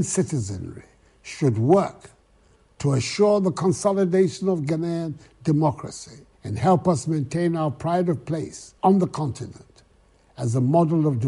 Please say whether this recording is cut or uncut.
cut